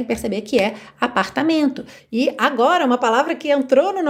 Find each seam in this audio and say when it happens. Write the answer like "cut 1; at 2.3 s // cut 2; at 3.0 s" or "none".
cut 1; at 2.0 s